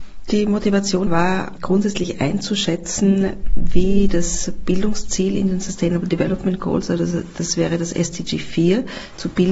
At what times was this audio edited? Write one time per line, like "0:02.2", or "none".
0:01.1